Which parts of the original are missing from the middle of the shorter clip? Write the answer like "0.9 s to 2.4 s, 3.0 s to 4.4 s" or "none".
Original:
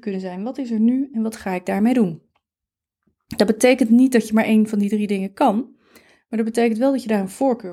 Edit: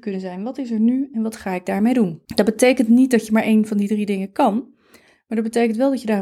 2.3 s to 3.3 s